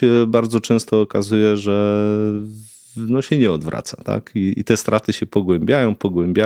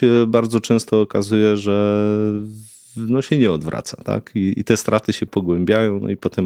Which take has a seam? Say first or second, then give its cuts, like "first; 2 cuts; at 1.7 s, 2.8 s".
second; 1 cut; at 5.3 s